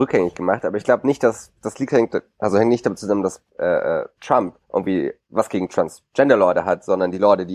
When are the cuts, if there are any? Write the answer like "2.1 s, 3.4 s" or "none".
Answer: 3.5 s, 4.6 s